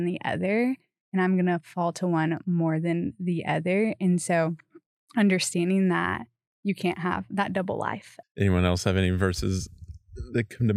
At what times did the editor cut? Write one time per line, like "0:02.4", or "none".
0:08.2